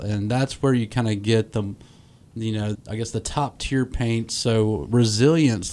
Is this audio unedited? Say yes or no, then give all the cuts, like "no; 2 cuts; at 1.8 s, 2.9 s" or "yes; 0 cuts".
no; 1 cut; at 2.7 s